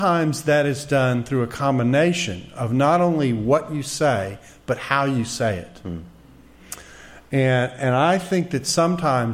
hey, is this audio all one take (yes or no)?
yes